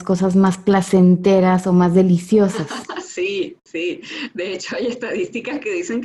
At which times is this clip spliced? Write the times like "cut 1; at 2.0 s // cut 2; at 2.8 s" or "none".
none